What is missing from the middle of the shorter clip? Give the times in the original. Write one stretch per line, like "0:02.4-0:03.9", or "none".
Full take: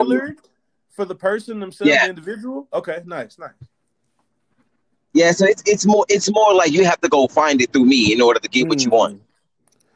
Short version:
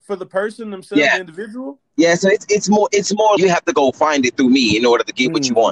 0:02.7-0:05.0
0:06.5-0:06.7